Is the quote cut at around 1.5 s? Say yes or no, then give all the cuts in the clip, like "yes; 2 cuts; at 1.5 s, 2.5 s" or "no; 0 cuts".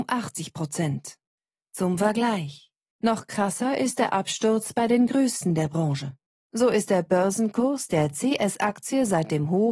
no; 1 cut; at 2.9 s